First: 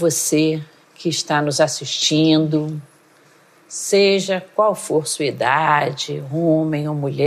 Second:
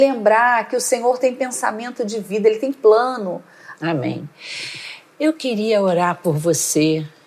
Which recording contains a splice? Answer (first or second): second